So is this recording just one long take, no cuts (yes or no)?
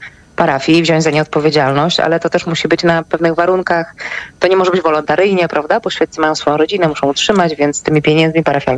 yes